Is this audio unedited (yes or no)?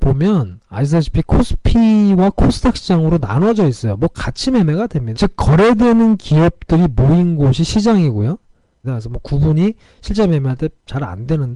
no